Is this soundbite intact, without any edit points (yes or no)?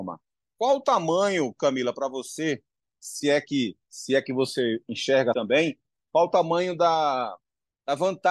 no